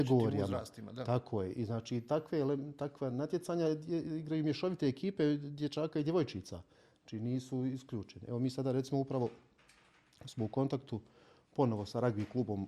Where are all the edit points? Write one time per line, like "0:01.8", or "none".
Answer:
none